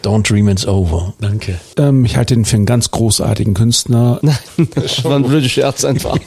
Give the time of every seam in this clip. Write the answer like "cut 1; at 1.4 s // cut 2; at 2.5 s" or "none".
cut 1; at 1.7 s // cut 2; at 4.2 s